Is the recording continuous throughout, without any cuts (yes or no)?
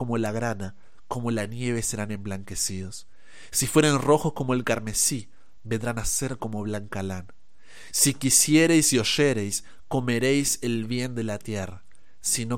yes